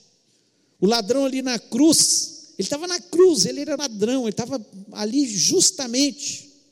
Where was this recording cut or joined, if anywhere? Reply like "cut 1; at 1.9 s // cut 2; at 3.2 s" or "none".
cut 1; at 3.8 s